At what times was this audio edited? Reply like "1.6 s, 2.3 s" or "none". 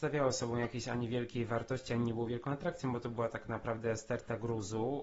none